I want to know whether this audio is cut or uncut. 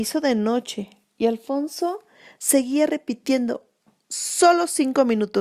uncut